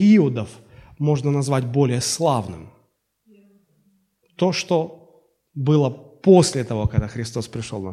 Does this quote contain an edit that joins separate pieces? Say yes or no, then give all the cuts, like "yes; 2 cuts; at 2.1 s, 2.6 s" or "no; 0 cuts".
no; 0 cuts